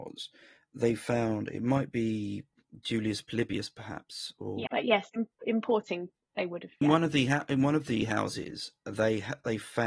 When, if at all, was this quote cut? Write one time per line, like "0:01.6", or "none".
0:04.7
0:06.8